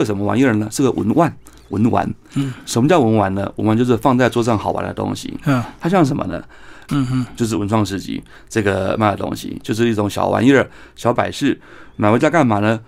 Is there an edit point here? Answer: yes; 1 cut; at 6.9 s

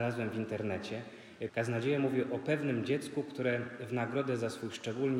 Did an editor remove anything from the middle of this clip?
yes; 1 cut; at 1.5 s

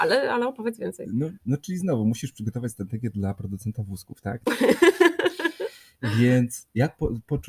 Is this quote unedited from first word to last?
no; 1 cut; at 4.4 s

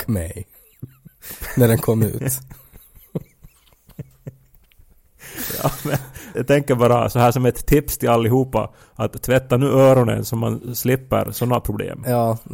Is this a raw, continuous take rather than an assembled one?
no; 1 cut; at 6.3 s

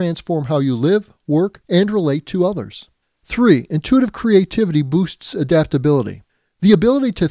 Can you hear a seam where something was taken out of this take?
yes; 2 cuts; at 1.6 s, 3.0 s

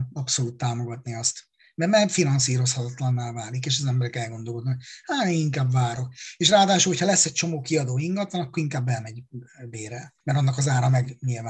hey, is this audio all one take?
no; 1 cut; at 10.2 s

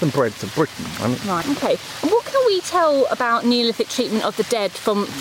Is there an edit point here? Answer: yes; 1 cut; at 1.4 s

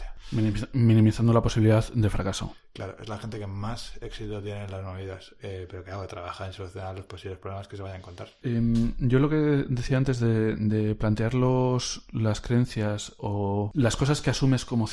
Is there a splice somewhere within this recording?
no; 0 cuts

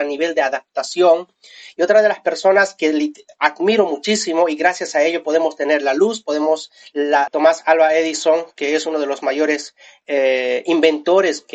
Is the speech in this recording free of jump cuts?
no; 1 cut; at 7.3 s

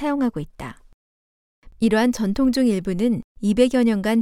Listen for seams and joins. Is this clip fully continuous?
no; 1 cut; at 1.7 s

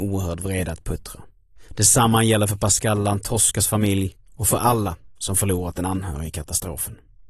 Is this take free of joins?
yes; 0 cuts

